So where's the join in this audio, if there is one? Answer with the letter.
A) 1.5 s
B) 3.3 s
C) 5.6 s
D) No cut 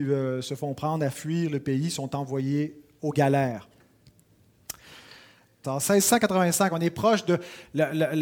C